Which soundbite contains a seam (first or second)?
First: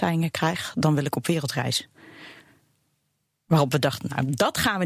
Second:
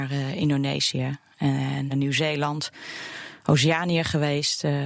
second